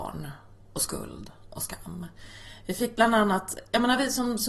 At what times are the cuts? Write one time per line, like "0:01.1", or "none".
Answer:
none